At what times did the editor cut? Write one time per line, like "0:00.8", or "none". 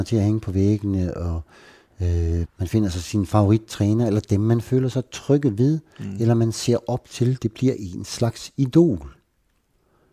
0:02.5

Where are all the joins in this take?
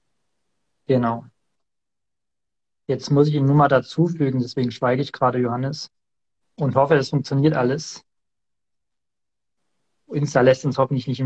0:06.4

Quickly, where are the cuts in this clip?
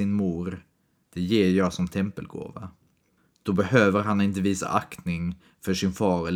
0:01.1

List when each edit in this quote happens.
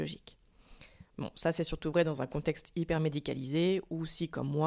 0:01.1

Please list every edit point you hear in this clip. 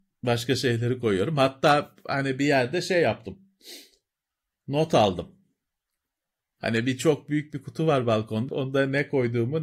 0:08.5

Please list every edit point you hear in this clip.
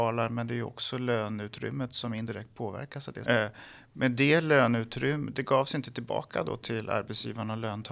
0:03.2
0:05.3

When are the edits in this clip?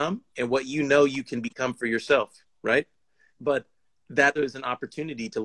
0:03.3
0:04.4

